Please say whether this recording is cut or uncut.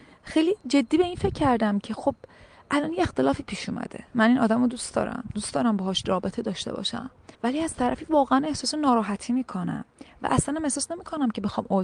cut